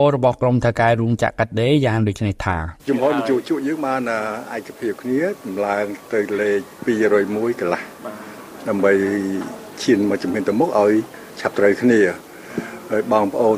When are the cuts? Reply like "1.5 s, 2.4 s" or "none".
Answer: 2.8 s